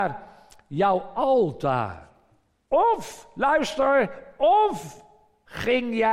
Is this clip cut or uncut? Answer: cut